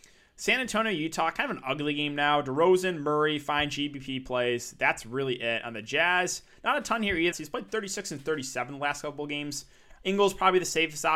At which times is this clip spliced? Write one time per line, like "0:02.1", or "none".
0:07.3
0:10.0